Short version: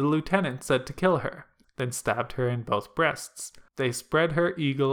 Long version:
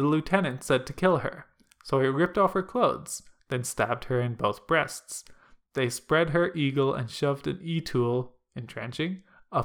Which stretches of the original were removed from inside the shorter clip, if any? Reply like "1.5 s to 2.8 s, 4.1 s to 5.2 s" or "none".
1.6 s to 3.4 s, 5.4 s to 5.7 s